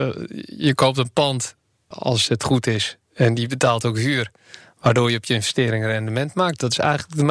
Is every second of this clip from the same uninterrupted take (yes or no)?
no